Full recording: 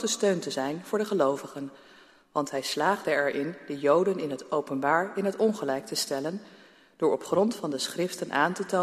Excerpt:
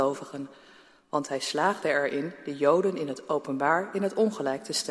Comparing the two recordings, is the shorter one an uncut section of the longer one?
yes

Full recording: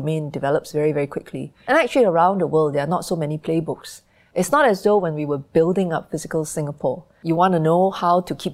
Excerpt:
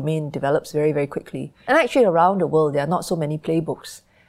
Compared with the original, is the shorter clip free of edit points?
yes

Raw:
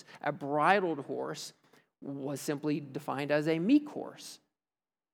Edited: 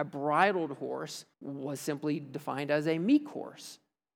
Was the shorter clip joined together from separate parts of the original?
yes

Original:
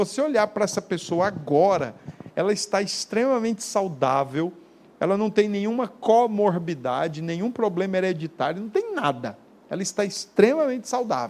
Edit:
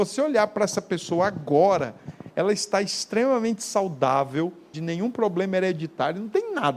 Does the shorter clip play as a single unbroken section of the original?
no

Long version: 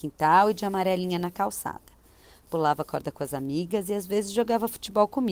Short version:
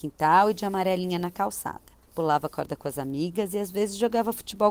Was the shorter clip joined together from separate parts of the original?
yes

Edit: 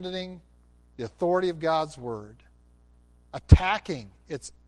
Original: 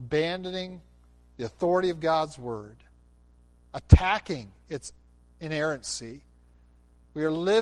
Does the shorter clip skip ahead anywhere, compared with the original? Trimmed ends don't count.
no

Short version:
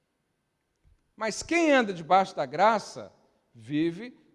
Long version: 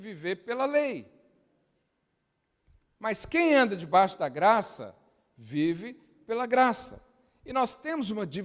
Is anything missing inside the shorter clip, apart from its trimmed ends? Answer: no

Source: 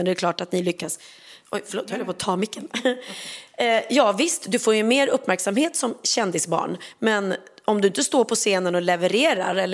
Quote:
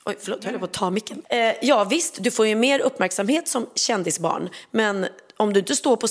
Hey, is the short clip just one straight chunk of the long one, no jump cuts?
no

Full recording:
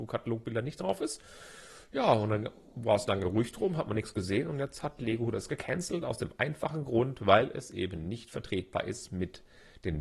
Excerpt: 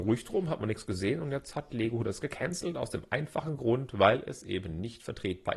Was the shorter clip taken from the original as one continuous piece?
yes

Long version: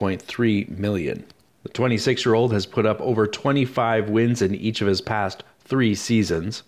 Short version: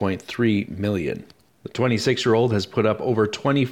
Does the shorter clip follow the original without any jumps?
yes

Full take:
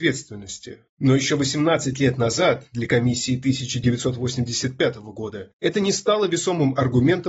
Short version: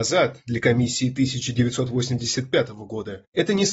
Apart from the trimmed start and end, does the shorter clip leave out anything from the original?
no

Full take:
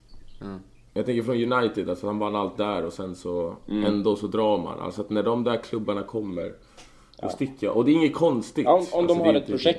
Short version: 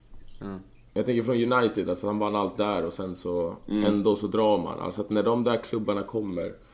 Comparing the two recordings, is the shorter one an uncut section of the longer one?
yes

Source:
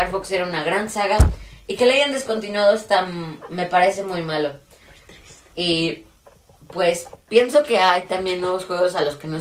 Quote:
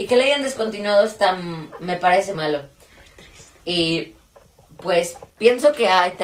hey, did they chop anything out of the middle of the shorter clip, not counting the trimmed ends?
yes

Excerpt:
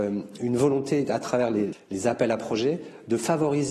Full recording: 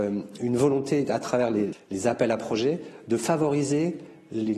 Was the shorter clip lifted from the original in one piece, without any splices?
yes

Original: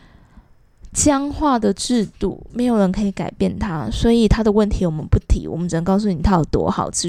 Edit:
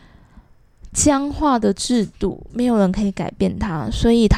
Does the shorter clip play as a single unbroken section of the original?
yes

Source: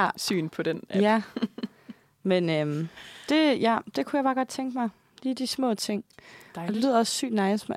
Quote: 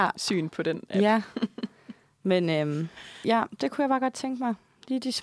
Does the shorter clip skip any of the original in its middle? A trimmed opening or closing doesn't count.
yes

